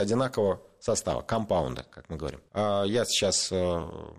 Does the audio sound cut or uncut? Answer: cut